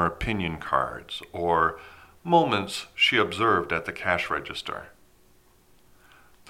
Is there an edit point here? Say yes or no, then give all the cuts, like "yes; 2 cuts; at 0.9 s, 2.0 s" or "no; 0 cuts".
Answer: no; 0 cuts